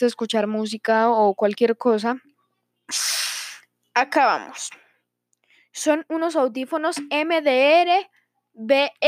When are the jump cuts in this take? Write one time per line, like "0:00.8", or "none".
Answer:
none